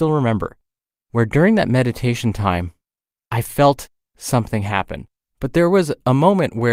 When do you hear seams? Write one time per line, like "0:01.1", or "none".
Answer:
0:05.2